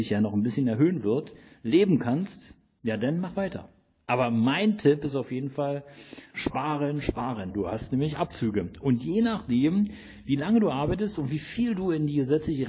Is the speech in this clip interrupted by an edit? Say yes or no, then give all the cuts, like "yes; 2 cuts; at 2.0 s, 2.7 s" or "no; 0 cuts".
yes; 2 cuts; at 6.3 s, 7.5 s